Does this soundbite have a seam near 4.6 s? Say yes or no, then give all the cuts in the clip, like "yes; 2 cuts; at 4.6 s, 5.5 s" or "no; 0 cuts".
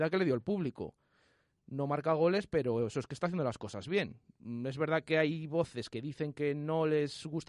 no; 1 cut; at 1.6 s